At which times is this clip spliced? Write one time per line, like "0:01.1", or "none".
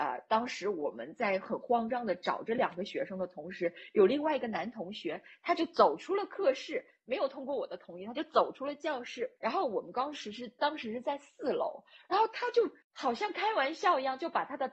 0:09.4
0:12.8